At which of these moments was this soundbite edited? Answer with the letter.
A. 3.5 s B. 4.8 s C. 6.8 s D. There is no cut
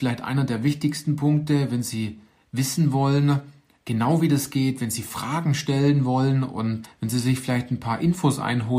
C